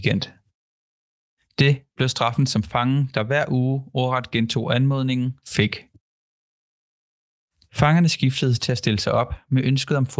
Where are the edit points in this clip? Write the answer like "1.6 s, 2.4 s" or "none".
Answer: none